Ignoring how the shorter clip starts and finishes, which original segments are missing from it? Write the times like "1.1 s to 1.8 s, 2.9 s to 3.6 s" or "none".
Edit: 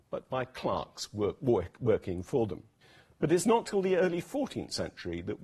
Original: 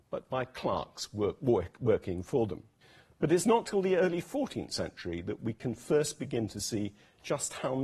none